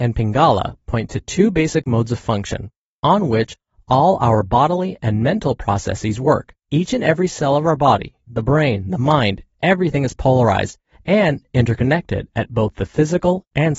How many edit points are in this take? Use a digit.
2